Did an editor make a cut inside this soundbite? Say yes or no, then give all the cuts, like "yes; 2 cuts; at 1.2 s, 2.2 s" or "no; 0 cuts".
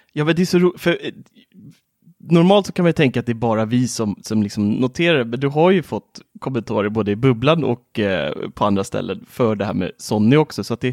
no; 0 cuts